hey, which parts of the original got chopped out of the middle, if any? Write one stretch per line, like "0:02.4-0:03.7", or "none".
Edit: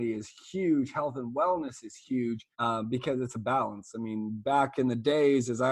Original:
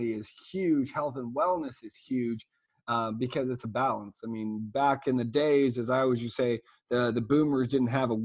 0:02.5-0:02.8